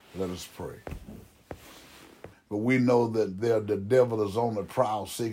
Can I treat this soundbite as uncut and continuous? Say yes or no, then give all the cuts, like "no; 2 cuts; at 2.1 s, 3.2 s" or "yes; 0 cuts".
no; 1 cut; at 2.3 s